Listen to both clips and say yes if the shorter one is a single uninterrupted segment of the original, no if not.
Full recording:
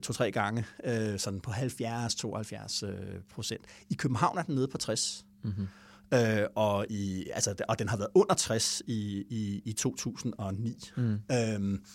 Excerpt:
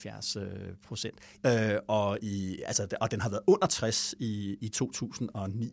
no